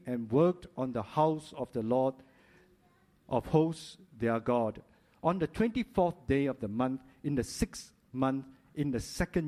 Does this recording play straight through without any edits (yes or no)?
yes